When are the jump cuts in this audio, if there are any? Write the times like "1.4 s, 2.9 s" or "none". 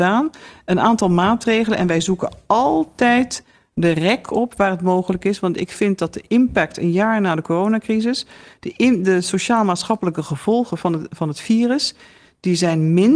none